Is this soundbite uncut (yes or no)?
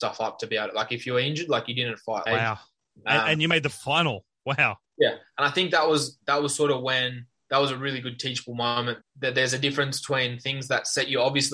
no